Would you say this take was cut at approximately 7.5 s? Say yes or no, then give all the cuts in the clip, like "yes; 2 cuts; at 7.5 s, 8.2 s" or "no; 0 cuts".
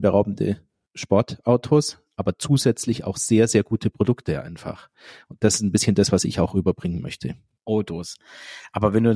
yes; 1 cut; at 7.5 s